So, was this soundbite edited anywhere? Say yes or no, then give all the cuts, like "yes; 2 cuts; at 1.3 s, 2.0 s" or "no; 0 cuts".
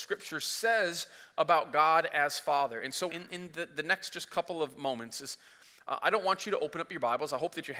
yes; 1 cut; at 3.1 s